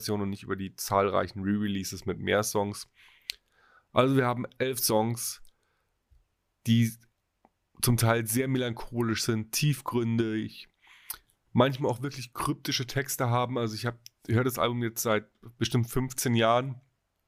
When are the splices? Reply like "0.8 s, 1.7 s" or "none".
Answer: none